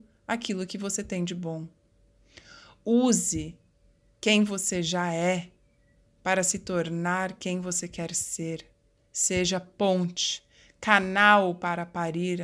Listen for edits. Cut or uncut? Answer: uncut